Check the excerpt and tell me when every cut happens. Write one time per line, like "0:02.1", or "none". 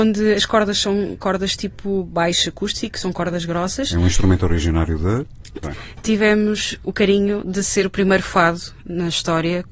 0:05.6
0:06.8